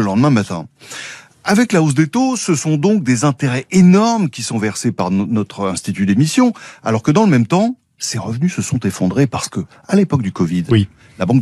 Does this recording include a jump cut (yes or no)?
no